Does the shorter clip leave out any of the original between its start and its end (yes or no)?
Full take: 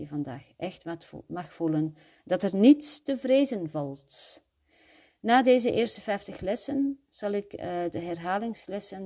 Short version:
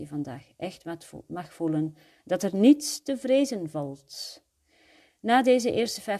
no